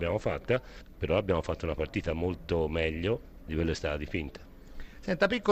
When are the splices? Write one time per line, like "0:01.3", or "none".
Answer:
0:00.9
0:03.5